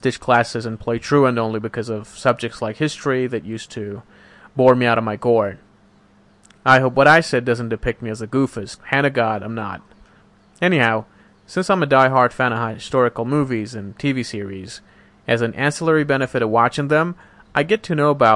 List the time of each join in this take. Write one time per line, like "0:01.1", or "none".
0:08.8